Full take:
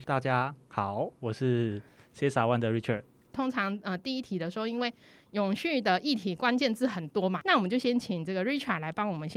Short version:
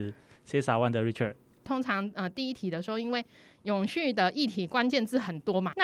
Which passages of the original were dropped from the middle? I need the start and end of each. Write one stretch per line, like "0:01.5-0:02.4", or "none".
none